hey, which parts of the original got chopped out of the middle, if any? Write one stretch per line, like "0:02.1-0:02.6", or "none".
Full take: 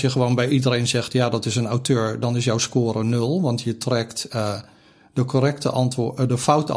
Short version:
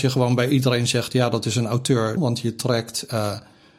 0:02.2-0:03.4